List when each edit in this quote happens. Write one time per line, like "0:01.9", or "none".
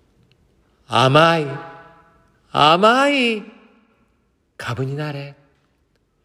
none